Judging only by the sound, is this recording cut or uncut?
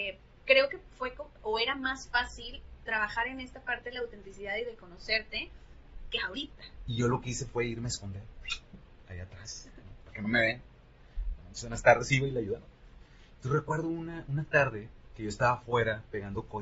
cut